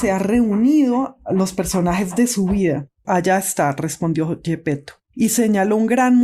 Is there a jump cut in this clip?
yes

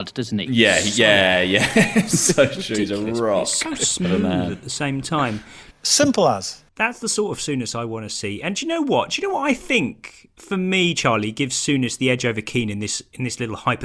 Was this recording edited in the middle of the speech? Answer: yes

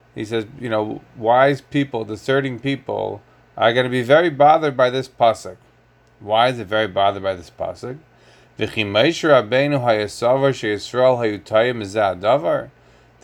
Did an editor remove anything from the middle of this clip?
no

